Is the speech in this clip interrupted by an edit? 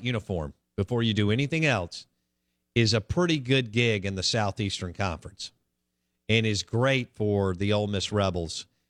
no; 0 cuts

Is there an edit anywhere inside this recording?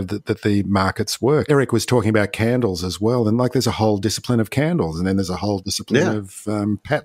yes; 1 cut; at 1.5 s

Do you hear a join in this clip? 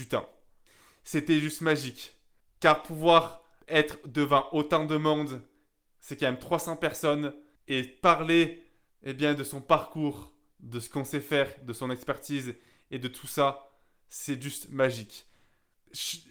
no; 0 cuts

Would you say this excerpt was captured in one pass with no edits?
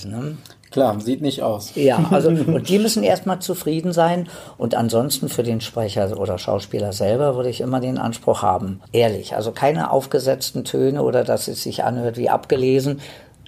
no; 1 cut; at 8.9 s

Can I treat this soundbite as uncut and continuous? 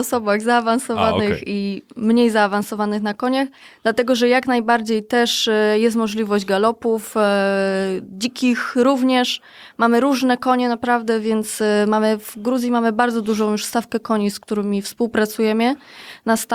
yes; 0 cuts

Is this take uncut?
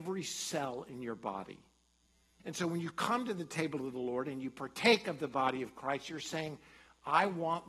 no; 1 cut; at 2.4 s

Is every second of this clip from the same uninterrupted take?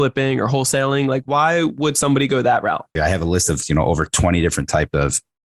no; 1 cut; at 3.0 s

